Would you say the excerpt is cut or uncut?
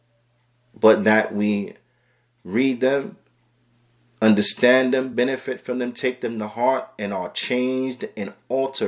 uncut